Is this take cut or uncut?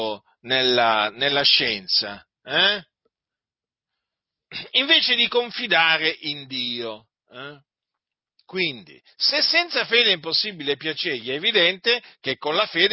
uncut